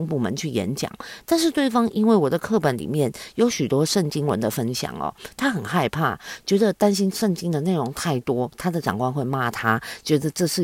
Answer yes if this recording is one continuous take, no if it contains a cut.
no